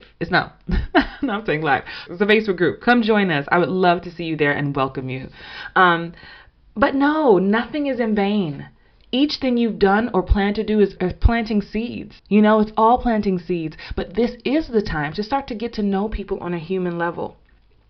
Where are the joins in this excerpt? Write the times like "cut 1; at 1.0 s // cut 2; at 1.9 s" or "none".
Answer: cut 1; at 2.1 s // cut 2; at 11.0 s // cut 3; at 12.2 s